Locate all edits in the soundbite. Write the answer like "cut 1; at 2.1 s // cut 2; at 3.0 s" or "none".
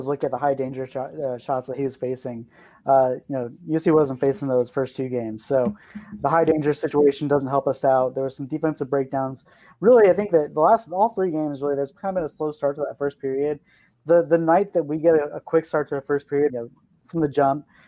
cut 1; at 16.5 s